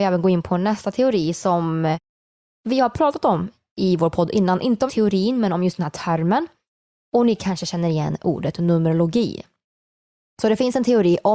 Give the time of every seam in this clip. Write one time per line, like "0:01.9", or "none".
0:04.9